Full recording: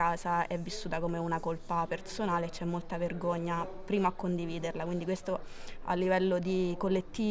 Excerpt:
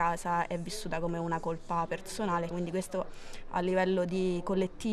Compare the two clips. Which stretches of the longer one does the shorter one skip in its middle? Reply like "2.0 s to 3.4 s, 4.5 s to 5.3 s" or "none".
2.5 s to 4.8 s